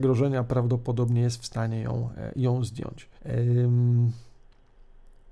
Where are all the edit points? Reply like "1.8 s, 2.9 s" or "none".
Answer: 3.2 s